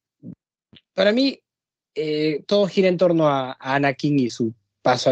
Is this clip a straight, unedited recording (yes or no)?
yes